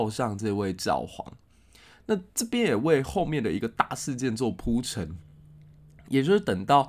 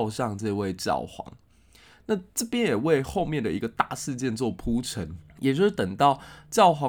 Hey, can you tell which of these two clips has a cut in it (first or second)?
second